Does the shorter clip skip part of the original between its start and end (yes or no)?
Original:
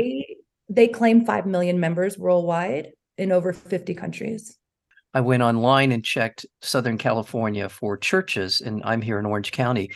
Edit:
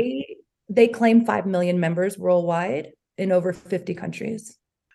no